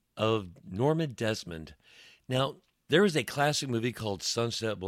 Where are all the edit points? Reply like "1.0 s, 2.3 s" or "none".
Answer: 2.7 s